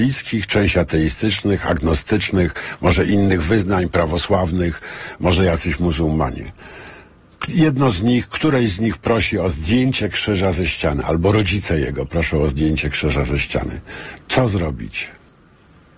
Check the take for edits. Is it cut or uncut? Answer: uncut